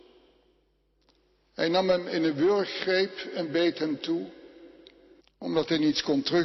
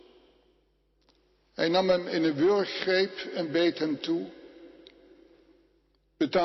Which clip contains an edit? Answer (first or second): first